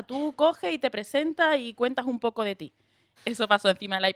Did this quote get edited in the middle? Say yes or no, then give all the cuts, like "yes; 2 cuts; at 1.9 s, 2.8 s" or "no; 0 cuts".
yes; 1 cut; at 3.2 s